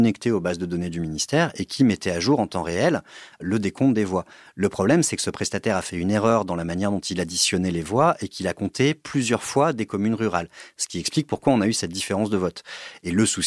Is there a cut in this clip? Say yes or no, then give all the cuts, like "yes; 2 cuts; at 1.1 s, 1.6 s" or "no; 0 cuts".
no; 0 cuts